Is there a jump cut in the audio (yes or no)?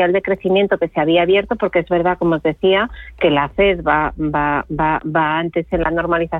no